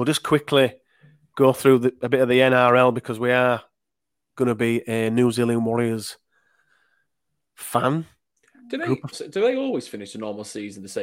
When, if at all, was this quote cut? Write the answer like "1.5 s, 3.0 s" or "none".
9.1 s